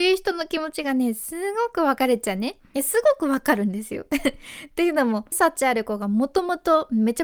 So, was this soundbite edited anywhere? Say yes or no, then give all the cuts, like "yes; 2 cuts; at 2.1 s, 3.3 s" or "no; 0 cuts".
yes; 2 cuts; at 2.7 s, 5.3 s